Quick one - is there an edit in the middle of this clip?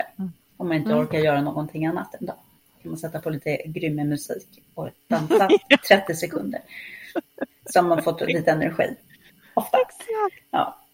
no; 0 cuts

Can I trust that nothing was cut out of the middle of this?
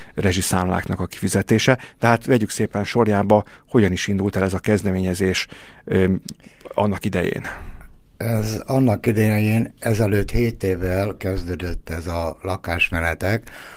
yes; 0 cuts

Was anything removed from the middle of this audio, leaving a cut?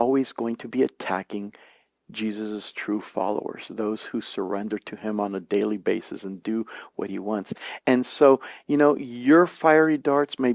no; 0 cuts

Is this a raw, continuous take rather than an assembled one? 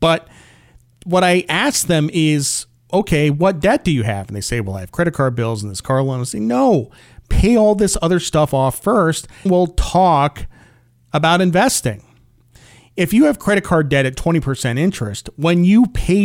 no; 1 cut; at 9.5 s

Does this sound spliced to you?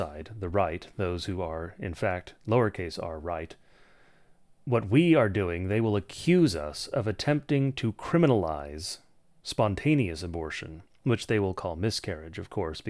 no; 0 cuts

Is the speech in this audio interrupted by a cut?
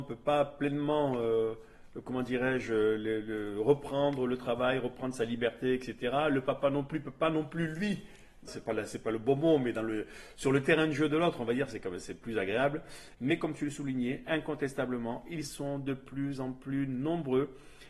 yes; 2 cuts; at 8.5 s, 13.1 s

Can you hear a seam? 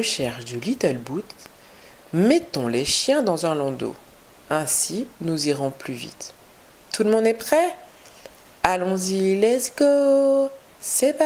no; 0 cuts

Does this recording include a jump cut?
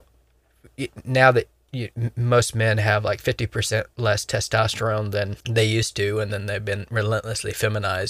yes; 1 cut; at 5.4 s

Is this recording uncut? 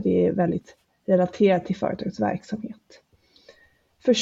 yes; 0 cuts

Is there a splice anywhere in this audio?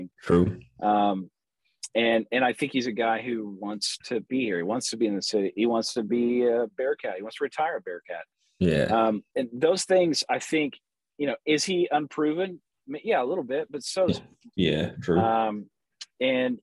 yes; 2 cuts; at 9.3 s, 14.5 s

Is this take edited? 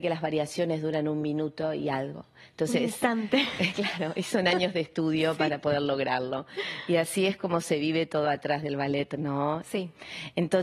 yes; 1 cut; at 9.6 s

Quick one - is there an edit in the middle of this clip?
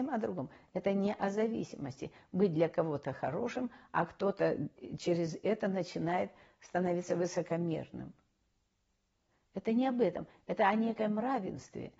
no; 0 cuts

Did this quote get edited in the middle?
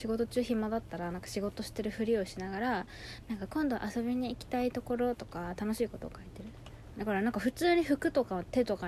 yes; 1 cut; at 6.9 s

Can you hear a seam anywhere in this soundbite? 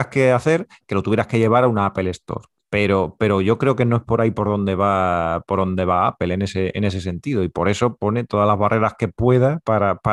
yes; 1 cut; at 2.6 s

